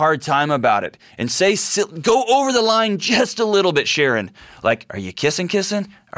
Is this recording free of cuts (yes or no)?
yes